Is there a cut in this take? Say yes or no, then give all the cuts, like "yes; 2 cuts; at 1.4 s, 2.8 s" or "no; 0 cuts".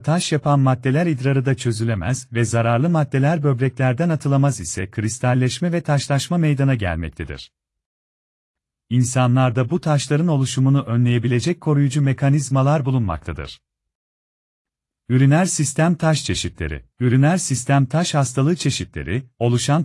yes; 2 cuts; at 14.9 s, 16.9 s